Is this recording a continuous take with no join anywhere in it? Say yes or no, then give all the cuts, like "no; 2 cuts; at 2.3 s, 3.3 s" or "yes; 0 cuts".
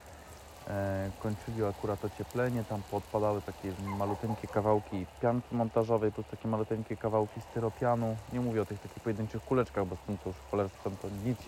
yes; 0 cuts